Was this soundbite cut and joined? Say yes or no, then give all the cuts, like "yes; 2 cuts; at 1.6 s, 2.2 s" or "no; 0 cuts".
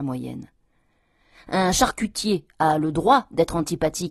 no; 0 cuts